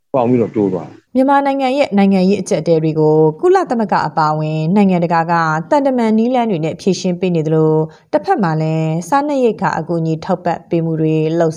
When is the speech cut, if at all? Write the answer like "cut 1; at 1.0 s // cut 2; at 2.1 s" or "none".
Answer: cut 1; at 1.1 s